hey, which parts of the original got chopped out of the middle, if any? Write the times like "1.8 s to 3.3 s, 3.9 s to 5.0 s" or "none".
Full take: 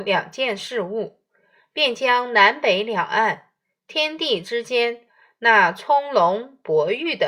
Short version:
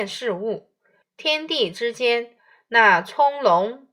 1.5 s to 3.7 s